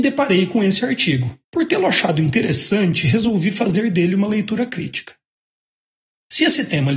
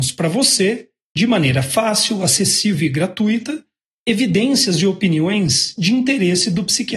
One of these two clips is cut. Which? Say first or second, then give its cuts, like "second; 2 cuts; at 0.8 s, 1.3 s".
first; 1 cut; at 1.4 s